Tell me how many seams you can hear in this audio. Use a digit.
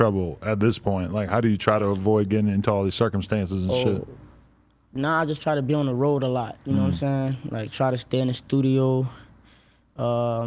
0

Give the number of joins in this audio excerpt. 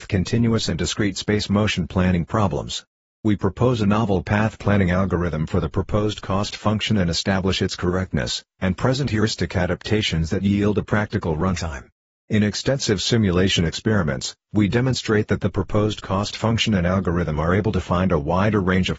0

